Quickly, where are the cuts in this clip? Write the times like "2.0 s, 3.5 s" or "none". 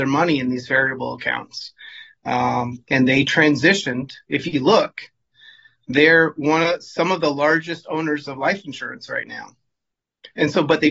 none